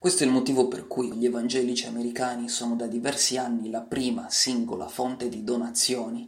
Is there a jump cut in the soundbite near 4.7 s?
no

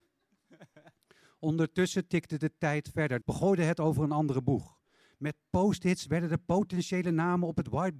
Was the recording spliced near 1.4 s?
no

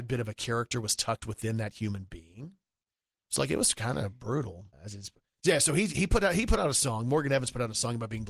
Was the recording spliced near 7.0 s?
no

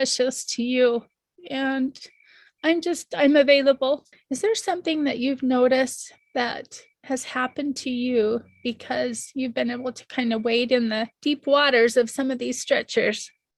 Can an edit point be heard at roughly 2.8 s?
no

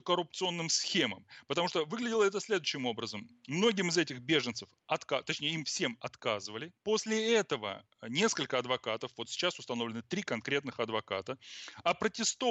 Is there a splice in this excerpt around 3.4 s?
no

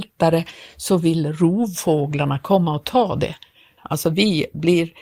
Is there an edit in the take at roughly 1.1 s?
no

